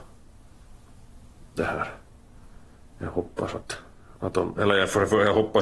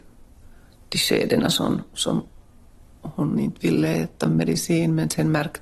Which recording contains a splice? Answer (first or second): first